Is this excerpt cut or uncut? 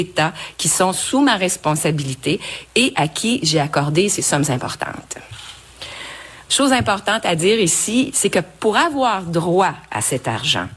cut